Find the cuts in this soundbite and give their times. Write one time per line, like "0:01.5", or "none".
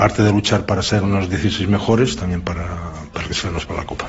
none